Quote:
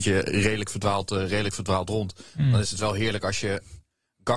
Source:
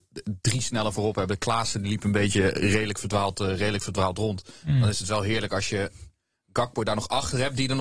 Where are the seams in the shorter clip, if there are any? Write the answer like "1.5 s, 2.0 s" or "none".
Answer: none

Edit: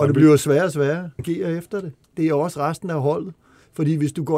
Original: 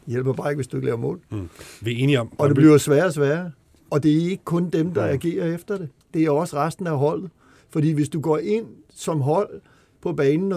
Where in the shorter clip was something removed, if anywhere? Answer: 1.2 s

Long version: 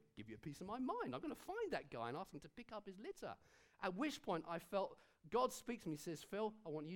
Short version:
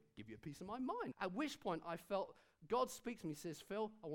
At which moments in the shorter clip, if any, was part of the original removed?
1.1 s

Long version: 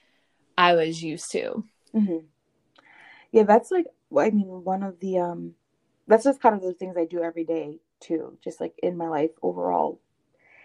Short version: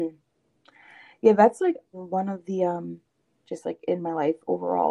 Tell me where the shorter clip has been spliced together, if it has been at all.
1.9 s, 3.4 s

